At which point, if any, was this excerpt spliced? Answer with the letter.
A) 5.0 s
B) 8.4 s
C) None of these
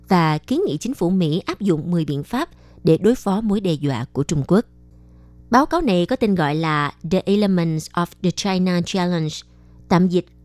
C